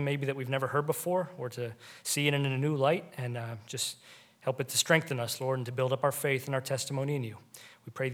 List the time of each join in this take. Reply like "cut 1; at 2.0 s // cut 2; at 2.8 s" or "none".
none